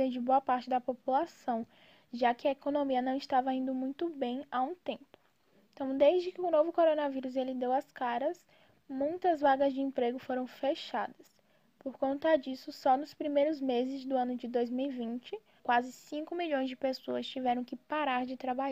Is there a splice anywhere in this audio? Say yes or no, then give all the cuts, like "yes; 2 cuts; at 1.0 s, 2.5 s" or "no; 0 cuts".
yes; 1 cut; at 15.6 s